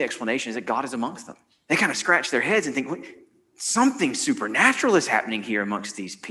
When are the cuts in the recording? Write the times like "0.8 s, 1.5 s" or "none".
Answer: 1.7 s